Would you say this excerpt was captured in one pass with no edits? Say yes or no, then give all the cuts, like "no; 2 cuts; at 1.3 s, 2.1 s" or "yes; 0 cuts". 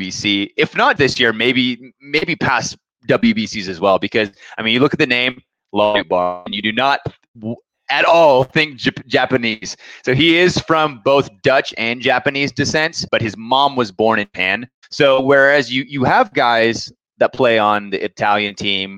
no; 2 cuts; at 1.0 s, 13.1 s